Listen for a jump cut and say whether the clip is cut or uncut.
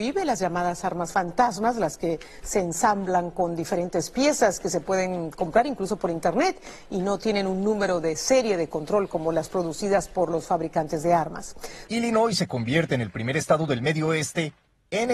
cut